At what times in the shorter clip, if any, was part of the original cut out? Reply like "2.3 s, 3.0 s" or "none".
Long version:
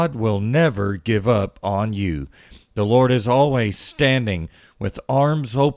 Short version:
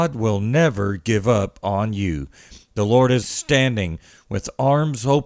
3.2 s